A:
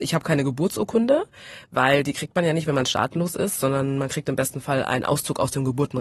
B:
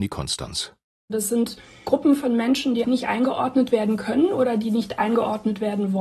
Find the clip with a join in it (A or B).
B